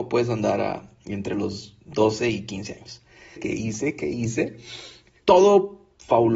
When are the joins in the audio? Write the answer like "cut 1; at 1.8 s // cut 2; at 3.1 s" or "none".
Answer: cut 1; at 3.4 s // cut 2; at 5.2 s